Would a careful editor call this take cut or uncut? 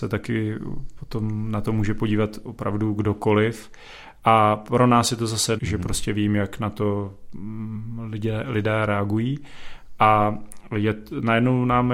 cut